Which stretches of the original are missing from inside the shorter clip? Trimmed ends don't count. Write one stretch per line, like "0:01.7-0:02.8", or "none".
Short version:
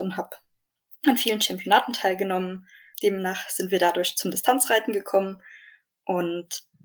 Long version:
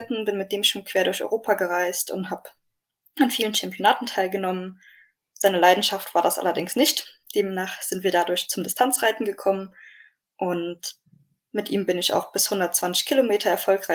0:05.1-0:07.3